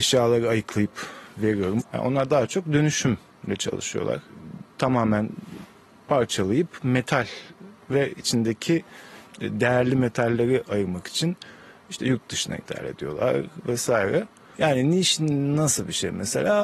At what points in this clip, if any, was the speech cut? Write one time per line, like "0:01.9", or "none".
0:01.8
0:14.6